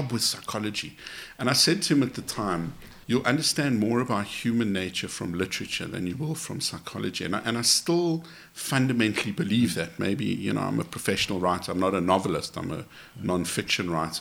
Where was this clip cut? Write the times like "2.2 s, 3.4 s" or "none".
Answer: 3.0 s